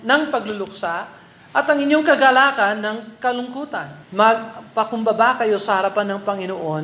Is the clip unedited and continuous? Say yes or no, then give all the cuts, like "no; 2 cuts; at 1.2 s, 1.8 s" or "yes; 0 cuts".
no; 1 cut; at 4.0 s